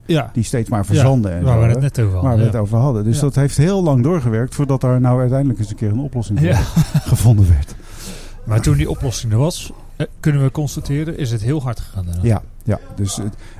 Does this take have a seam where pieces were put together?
no; 0 cuts

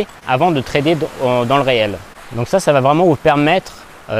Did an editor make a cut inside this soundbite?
no; 0 cuts

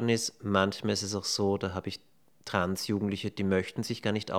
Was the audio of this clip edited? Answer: no; 0 cuts

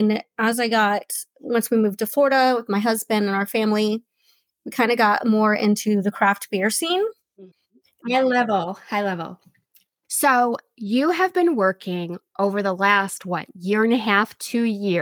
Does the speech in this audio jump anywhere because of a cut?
yes; 2 cuts; at 8.0 s, 10.0 s

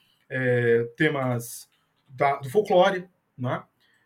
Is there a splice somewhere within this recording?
no; 0 cuts

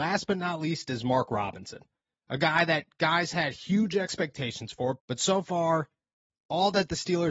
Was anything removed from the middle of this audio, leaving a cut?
yes; 1 cut; at 5.0 s

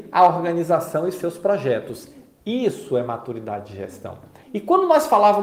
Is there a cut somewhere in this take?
yes; 1 cut; at 4.4 s

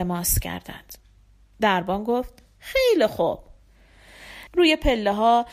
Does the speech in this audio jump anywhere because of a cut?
yes; 1 cut; at 4.5 s

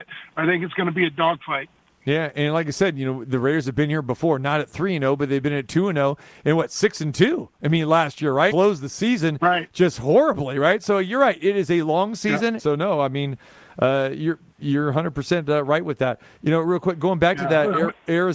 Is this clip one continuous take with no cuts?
no; 2 cuts; at 8.5 s, 12.6 s

